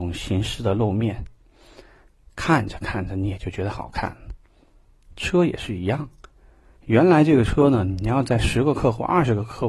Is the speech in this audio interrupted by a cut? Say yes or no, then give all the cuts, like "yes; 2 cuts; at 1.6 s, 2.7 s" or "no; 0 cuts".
no; 0 cuts